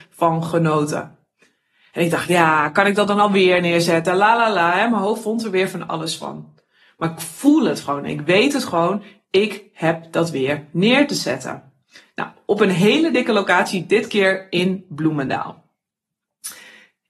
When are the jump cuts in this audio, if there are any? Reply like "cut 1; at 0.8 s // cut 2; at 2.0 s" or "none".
none